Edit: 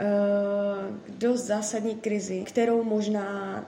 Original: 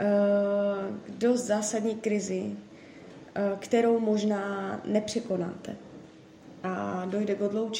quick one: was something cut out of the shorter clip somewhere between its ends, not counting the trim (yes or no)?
yes